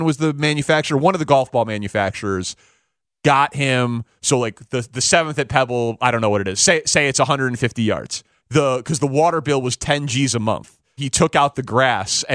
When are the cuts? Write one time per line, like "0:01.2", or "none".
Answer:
0:08.4
0:11.0